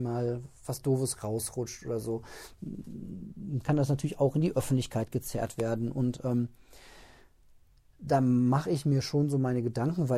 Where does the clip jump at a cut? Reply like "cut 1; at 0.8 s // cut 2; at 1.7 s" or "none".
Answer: none